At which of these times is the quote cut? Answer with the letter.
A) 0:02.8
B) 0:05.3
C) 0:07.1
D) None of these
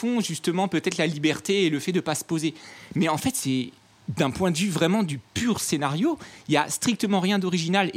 B